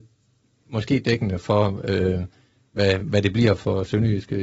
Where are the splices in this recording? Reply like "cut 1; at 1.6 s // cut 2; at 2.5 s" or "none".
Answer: none

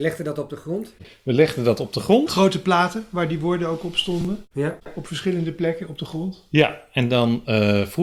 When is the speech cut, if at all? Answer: none

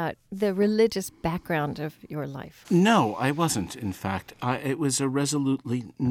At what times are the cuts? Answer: cut 1; at 2.6 s

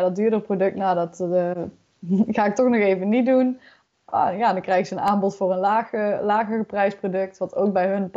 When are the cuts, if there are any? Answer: none

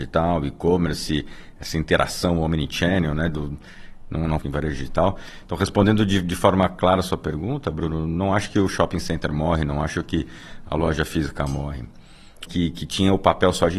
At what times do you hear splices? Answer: cut 1; at 4.4 s // cut 2; at 12.5 s

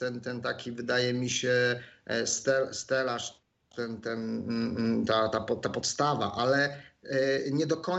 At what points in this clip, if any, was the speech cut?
none

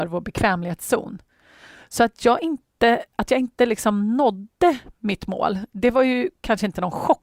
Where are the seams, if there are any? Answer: none

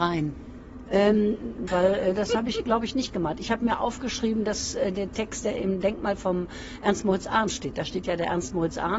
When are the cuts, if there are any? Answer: cut 1; at 1.7 s

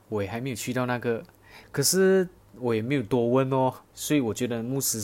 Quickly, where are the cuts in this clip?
cut 1; at 1.6 s // cut 2; at 3.9 s

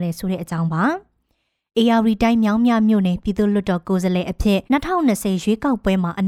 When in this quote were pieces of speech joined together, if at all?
cut 1; at 4.7 s

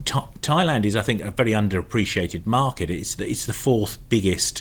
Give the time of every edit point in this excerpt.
none

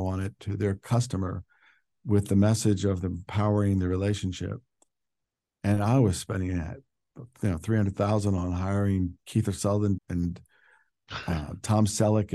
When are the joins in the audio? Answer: cut 1; at 10.0 s

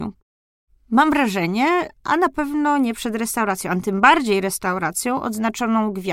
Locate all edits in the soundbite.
cut 1; at 2.0 s

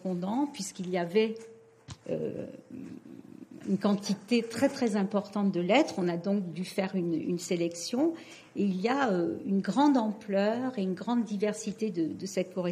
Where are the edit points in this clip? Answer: none

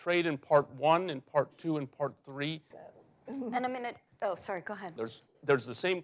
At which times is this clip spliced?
cut 1; at 2.7 s // cut 2; at 5.0 s

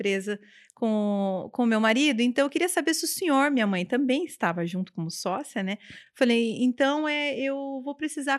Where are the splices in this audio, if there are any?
none

